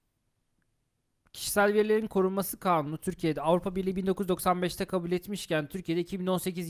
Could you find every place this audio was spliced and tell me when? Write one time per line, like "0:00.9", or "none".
none